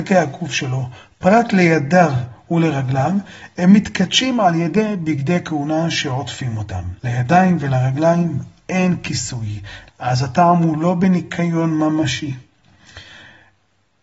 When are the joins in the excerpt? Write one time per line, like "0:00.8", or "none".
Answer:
0:07.0
0:09.9

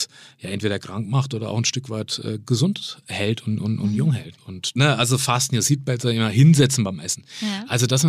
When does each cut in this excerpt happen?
none

